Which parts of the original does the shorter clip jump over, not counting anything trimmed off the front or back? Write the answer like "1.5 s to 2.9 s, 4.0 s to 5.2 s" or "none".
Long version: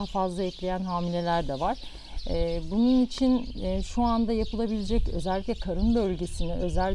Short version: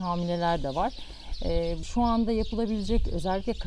2.7 s to 3.8 s